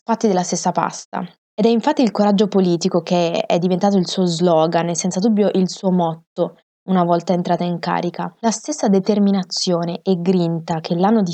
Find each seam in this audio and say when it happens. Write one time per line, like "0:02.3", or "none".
0:01.4